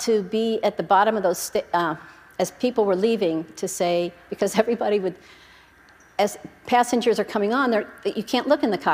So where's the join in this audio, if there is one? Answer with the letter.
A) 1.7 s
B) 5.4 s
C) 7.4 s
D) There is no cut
D